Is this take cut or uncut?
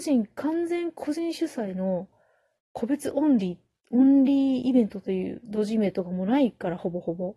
uncut